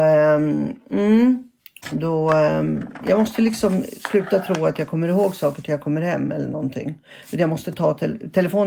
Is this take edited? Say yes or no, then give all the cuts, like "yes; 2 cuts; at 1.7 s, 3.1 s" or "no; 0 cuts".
no; 0 cuts